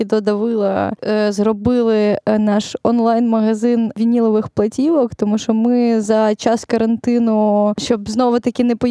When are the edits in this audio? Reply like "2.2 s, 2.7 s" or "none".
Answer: none